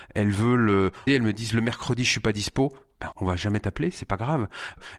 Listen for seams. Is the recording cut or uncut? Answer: cut